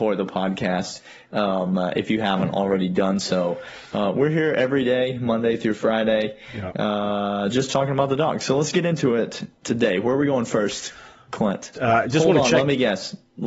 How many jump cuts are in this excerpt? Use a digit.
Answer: 1